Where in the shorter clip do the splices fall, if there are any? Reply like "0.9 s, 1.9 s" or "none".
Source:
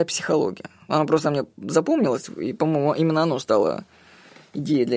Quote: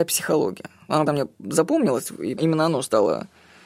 1.1 s, 2.4 s

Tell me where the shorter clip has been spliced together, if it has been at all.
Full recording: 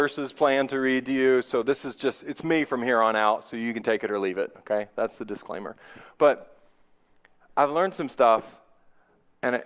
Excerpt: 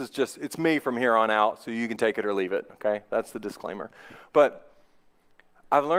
none

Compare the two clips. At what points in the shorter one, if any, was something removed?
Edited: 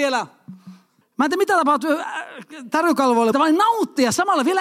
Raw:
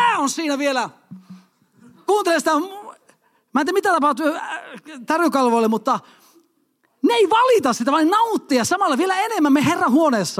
1.0 s, 3.3 s

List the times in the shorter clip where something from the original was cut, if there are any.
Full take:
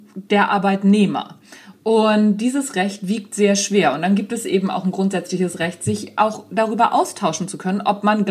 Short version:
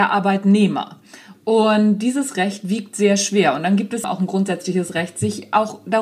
4.0 s

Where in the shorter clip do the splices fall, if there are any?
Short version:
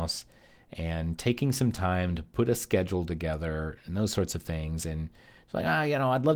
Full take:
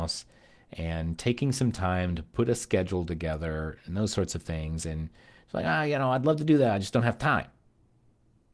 none

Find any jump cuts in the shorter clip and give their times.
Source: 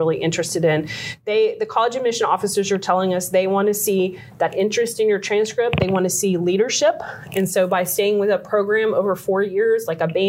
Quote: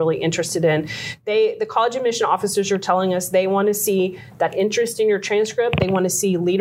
none

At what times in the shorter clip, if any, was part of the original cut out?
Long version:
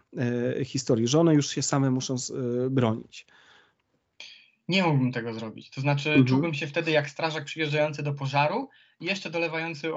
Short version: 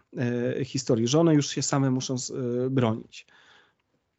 none

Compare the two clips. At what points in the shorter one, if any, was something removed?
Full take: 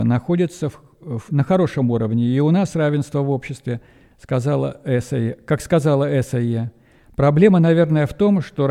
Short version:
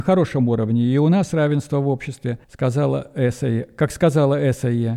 2.4 s

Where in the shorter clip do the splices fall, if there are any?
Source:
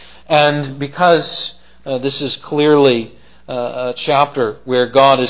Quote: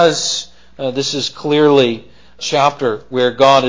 2.4 s

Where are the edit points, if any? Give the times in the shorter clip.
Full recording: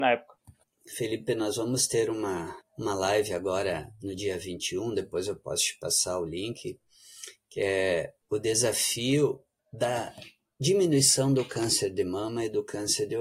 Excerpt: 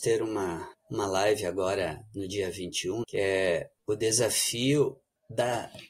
3.0 s

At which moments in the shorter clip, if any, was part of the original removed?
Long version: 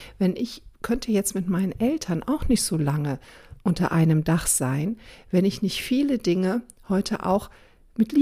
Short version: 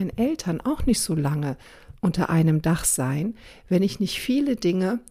none

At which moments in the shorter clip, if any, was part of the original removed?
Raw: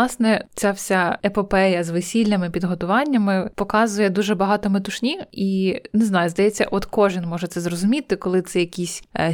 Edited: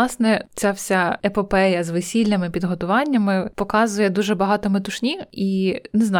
none

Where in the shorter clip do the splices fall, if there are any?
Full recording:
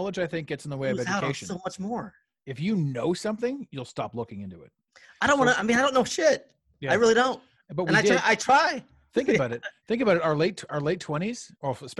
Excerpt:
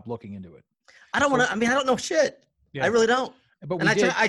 none

